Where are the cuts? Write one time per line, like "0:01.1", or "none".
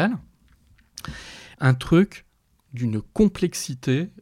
0:01.5